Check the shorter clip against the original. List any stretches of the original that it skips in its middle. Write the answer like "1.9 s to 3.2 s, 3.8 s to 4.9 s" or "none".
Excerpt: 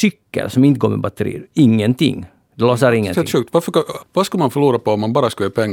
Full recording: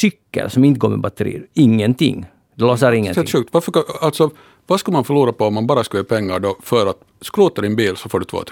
4.0 s to 4.5 s